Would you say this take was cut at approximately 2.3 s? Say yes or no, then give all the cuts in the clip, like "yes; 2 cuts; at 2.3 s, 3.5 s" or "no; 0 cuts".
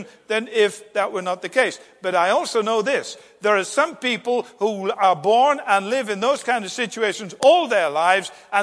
no; 0 cuts